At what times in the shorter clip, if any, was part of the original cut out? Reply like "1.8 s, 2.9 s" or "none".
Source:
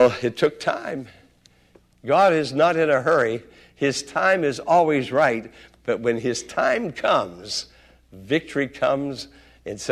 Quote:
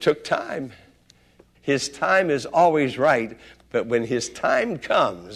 1.5 s